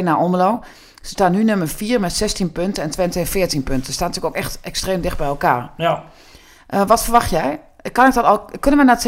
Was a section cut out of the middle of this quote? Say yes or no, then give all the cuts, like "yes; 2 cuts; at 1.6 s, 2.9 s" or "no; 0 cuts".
no; 0 cuts